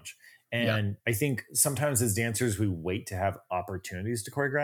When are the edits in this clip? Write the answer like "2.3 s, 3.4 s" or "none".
1.0 s